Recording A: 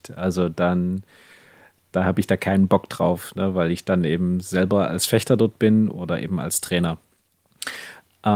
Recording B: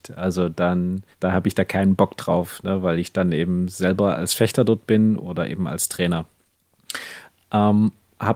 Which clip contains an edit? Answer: B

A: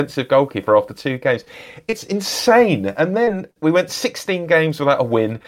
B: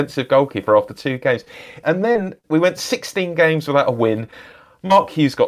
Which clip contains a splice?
B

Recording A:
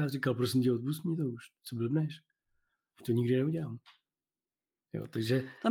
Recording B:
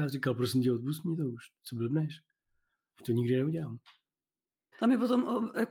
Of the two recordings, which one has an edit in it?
B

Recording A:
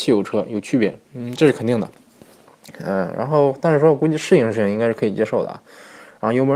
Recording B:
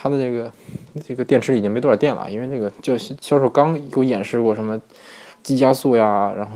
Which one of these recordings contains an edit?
A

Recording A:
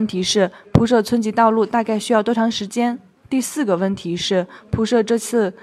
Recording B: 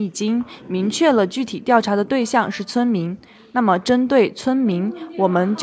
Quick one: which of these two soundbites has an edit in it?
A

